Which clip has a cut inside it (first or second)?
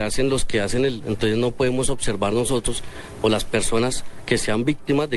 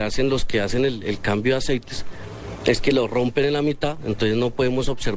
first